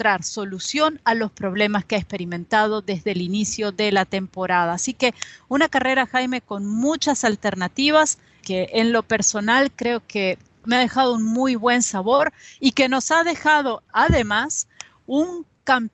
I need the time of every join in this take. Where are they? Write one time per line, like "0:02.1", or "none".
0:08.4